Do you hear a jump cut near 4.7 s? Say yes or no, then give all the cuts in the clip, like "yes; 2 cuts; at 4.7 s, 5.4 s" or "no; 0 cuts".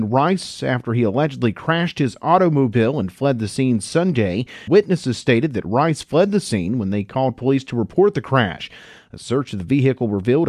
yes; 1 cut; at 4.7 s